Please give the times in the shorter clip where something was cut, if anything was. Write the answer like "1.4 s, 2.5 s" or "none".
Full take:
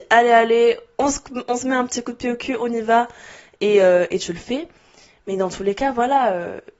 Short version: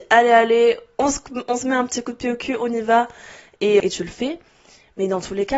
3.8 s

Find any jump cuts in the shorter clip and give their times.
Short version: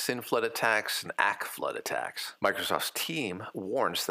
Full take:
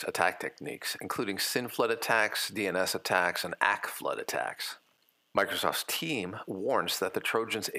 1.0 s, 2.4 s

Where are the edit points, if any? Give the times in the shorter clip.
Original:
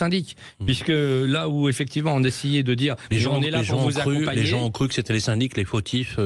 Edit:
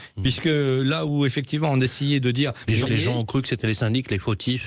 2.9 s

